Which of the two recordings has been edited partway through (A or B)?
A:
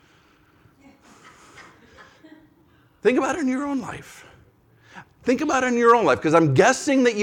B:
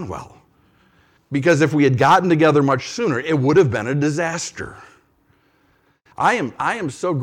B